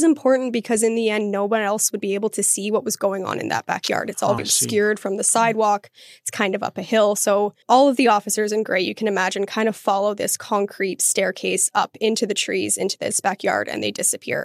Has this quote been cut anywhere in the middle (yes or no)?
yes